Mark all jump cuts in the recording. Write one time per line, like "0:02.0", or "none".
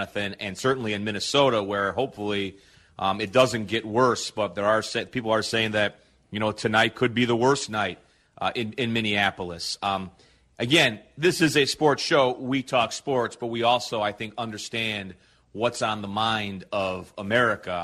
none